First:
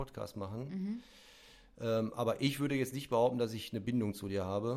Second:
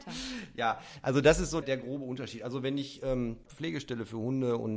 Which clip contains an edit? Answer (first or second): second